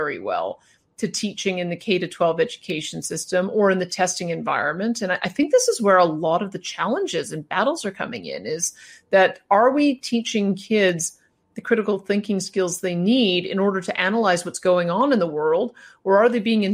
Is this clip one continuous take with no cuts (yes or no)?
yes